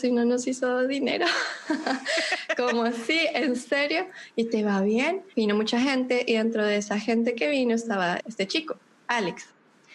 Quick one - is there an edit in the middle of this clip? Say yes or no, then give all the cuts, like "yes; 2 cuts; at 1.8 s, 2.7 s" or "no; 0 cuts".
yes; 2 cuts; at 5.3 s, 8.2 s